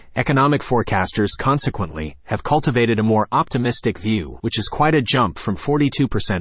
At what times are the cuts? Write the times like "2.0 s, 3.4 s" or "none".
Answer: 4.4 s